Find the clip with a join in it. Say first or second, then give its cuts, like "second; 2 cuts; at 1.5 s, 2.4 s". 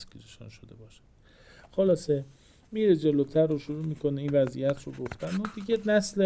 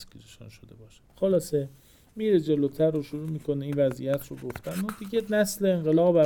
second; 1 cut; at 1.1 s